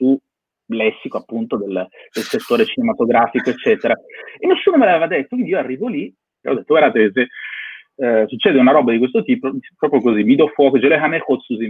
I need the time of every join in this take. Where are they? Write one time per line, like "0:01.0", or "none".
0:06.4
0:09.4